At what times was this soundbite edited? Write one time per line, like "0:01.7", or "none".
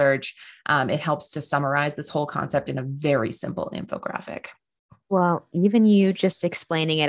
none